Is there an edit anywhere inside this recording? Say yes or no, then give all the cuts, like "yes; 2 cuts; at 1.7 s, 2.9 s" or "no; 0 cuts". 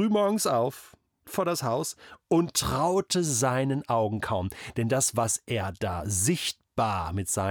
yes; 1 cut; at 1.2 s